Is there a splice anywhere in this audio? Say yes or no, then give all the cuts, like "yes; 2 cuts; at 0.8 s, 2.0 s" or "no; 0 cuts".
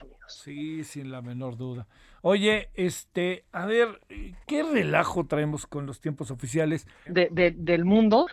yes; 3 cuts; at 2.2 s, 4.4 s, 7.1 s